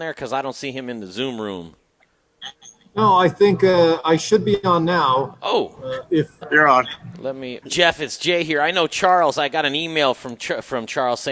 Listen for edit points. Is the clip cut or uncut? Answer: cut